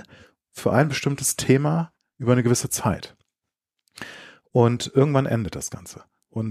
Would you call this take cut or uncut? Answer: uncut